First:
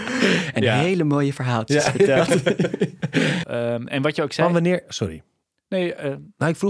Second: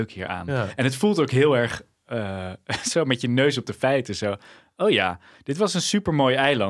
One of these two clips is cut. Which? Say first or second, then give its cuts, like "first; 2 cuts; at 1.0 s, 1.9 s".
first; 1 cut; at 3.4 s